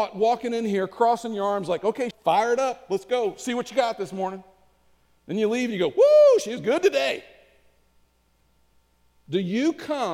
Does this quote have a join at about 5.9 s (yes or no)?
no